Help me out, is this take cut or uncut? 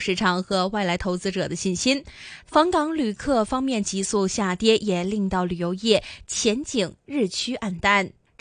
uncut